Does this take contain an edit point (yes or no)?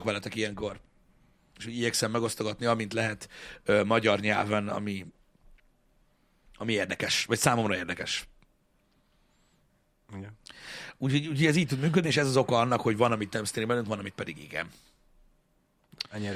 no